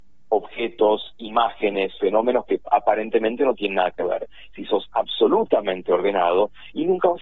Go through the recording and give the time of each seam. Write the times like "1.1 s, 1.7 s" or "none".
4.5 s